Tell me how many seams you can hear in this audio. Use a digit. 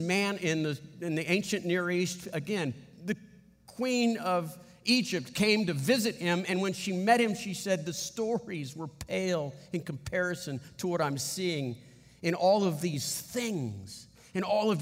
0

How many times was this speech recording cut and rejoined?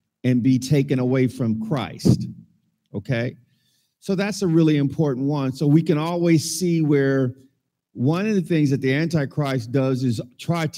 0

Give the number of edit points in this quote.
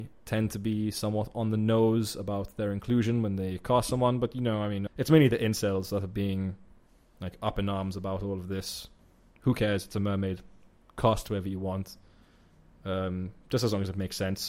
1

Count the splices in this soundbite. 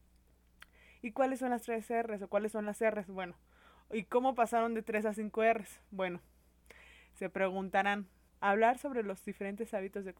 1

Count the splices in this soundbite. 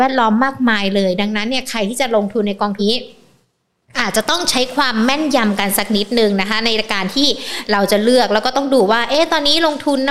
1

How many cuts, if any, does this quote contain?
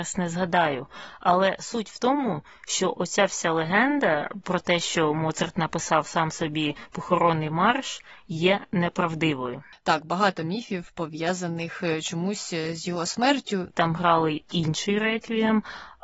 1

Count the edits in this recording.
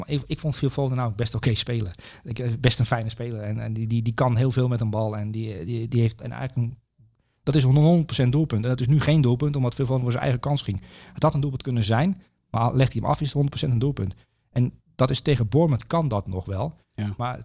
1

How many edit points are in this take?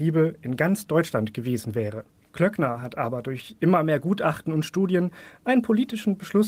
1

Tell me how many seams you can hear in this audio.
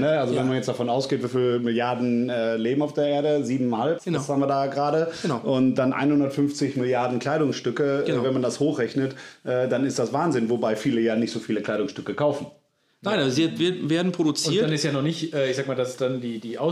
1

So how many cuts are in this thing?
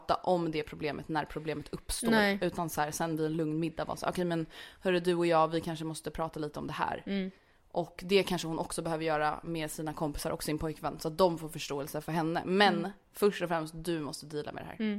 1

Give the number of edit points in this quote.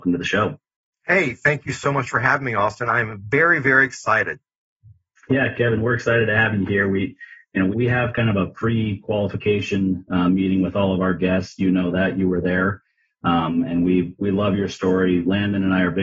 1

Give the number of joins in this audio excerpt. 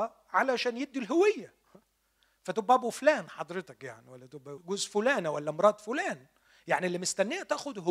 1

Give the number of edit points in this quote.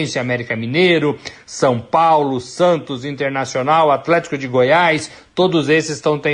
0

